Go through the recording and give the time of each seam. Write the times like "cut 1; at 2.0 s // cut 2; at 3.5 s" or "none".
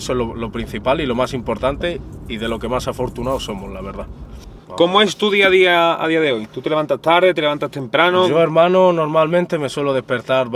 cut 1; at 4.6 s